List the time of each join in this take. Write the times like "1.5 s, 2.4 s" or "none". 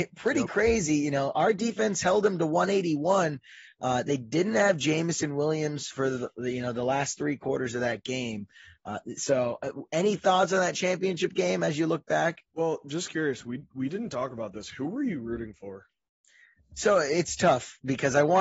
12.5 s